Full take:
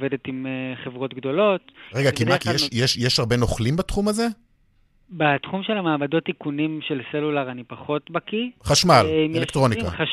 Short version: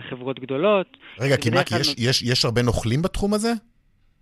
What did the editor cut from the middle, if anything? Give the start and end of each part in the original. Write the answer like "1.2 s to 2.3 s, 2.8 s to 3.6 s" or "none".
none